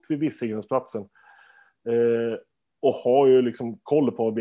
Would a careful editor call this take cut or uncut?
uncut